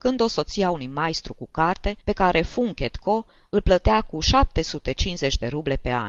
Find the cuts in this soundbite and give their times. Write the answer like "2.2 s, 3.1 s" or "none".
2.0 s

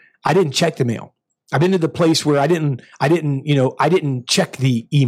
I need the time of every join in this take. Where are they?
none

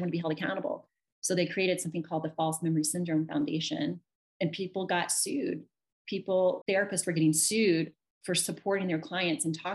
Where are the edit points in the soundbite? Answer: 6.6 s

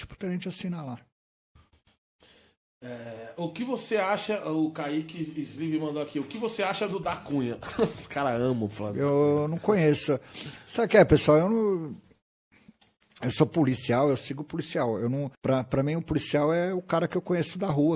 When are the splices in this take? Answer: 15.3 s

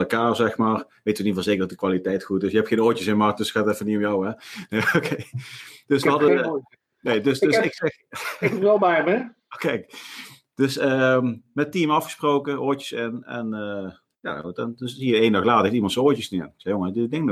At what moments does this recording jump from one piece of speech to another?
none

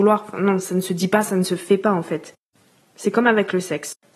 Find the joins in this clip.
1.3 s, 2.8 s

